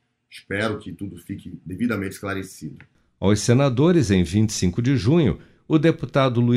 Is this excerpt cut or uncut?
uncut